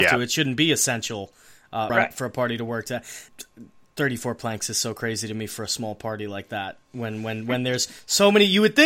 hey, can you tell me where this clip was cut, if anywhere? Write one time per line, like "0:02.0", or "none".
0:01.9
0:03.3

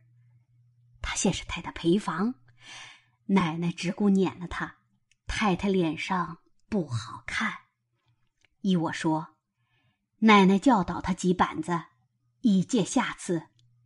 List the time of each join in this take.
0:01.5

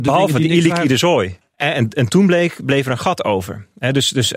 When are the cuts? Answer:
0:01.4

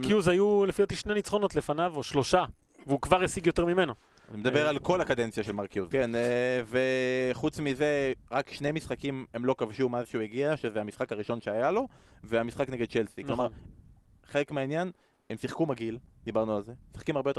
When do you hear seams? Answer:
0:05.9

